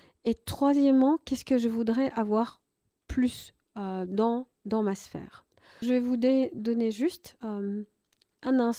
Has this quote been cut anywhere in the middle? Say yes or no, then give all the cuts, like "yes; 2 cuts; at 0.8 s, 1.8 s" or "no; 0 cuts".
yes; 1 cut; at 5.8 s